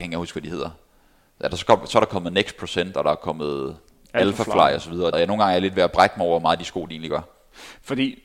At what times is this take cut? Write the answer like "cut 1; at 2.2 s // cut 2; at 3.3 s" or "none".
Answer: cut 1; at 5.1 s